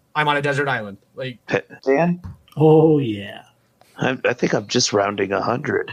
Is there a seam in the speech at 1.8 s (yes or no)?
yes